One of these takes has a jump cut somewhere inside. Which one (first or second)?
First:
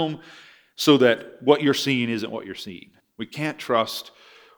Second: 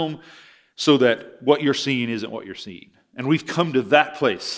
first